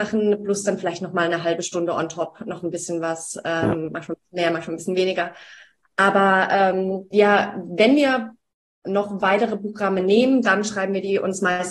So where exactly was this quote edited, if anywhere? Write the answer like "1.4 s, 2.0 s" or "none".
7.1 s

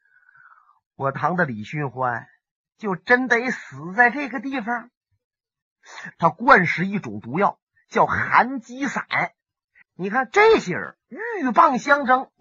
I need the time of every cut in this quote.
1.1 s, 6.1 s, 9.8 s

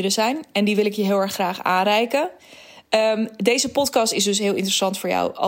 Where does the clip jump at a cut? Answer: none

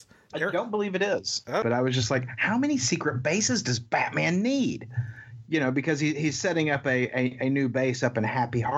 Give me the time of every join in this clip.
1.6 s

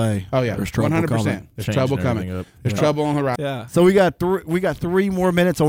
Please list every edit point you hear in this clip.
3.3 s

